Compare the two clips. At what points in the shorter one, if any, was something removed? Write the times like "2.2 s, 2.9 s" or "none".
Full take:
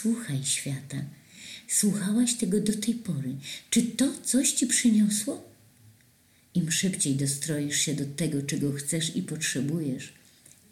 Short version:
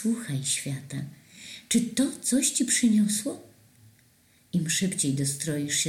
1.7 s